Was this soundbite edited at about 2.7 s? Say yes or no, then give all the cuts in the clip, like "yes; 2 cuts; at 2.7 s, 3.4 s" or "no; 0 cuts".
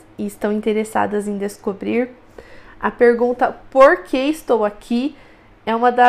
no; 0 cuts